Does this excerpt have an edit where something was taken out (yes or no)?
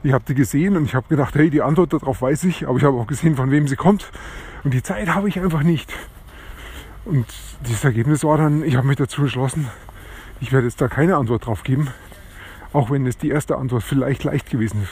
yes